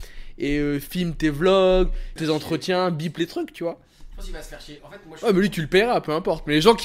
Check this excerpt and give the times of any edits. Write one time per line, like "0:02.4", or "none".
0:02.2
0:04.8

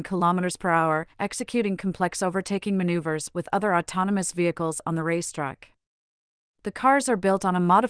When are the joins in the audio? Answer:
none

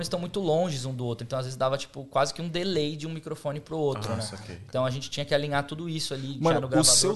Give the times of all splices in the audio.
none

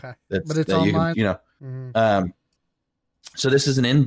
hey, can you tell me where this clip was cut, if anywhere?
0:01.1

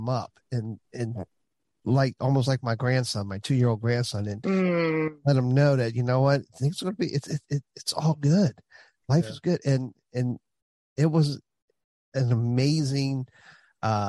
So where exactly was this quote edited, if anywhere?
none

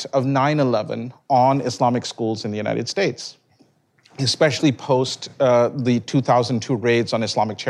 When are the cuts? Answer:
none

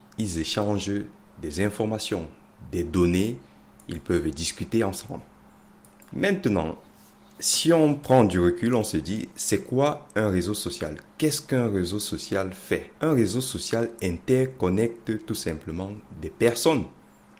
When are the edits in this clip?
0:06.1
0:13.0

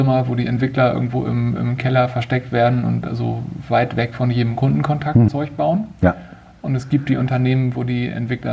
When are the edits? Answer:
0:05.3

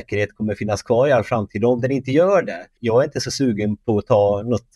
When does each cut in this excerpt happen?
0:02.8

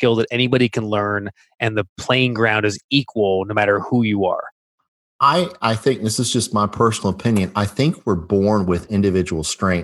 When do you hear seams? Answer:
none

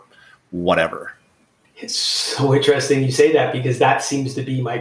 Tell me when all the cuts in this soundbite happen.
none

